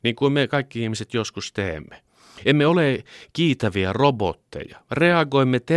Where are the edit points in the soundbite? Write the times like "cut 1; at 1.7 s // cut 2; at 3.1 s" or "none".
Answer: none